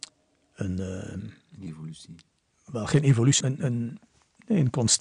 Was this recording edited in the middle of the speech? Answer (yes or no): yes